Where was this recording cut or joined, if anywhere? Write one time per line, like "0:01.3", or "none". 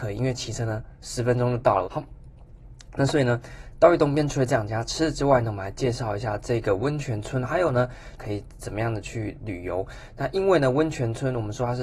0:01.8
0:08.2